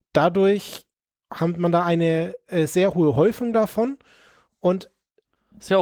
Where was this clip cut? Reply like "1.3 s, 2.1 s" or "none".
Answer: none